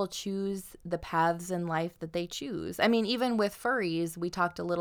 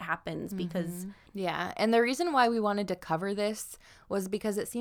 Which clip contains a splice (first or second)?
second